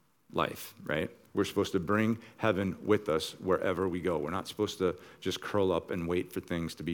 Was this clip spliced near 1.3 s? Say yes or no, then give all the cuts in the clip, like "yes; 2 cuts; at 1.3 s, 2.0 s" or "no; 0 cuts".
yes; 1 cut; at 1.3 s